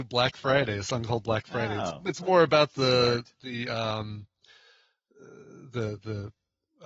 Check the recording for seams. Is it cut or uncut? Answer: uncut